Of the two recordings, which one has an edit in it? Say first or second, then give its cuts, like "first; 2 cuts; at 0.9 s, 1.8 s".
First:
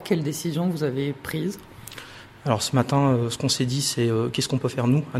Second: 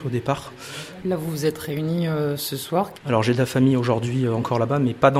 second; 2 cuts; at 1.0 s, 2.9 s